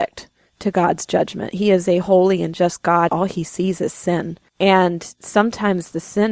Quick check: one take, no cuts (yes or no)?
no